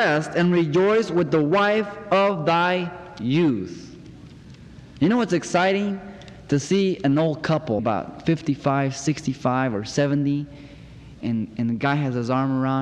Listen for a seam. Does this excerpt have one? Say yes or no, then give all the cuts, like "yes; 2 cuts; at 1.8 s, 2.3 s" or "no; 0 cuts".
yes; 2 cuts; at 7.8 s, 11.2 s